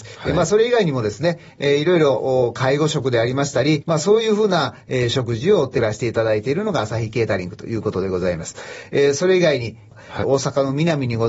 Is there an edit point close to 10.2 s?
yes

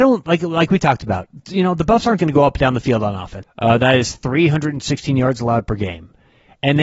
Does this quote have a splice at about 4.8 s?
no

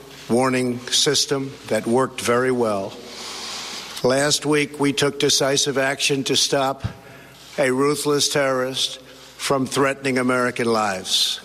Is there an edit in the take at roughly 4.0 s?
yes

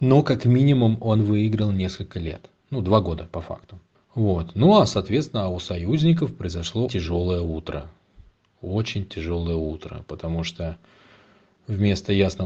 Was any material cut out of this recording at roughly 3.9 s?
yes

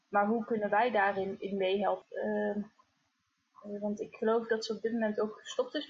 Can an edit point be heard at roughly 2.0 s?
yes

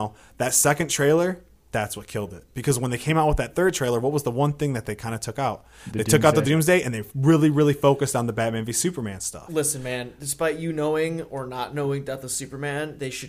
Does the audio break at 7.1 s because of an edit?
no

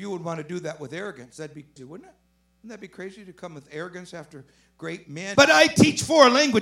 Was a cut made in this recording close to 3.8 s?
no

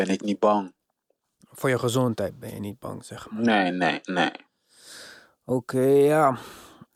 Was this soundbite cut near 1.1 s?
no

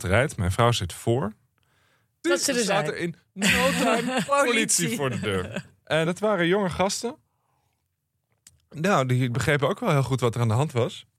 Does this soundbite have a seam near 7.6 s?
no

